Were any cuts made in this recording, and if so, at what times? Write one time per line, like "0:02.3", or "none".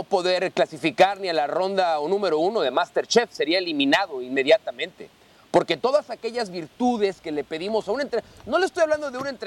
none